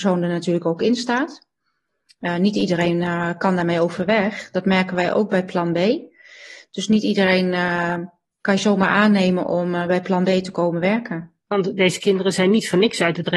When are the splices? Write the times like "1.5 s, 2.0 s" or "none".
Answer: 11.5 s